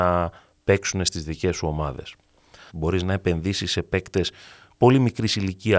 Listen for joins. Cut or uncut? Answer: cut